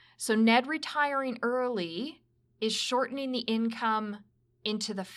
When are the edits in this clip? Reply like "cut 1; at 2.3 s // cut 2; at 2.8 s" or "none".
none